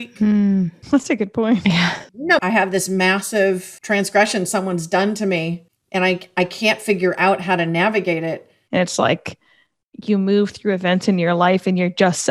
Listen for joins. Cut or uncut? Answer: cut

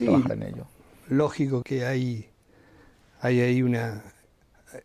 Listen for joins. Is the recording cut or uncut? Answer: cut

